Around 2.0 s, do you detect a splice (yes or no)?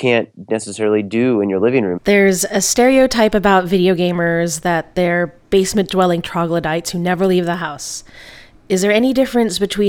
yes